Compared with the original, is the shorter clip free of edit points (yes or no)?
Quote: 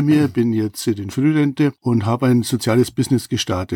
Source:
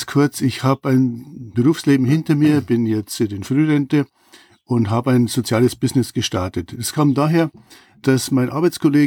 no